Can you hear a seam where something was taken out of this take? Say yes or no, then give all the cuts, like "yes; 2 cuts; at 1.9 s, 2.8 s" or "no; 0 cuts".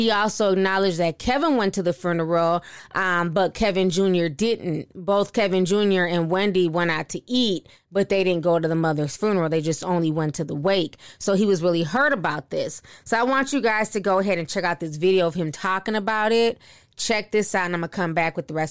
no; 0 cuts